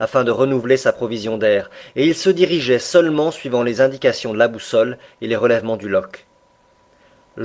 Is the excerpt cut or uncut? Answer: uncut